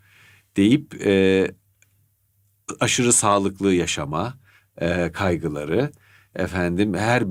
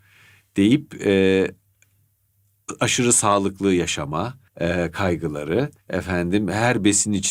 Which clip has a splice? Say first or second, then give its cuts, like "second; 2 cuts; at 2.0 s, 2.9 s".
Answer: second; 2 cuts; at 4.5 s, 5.8 s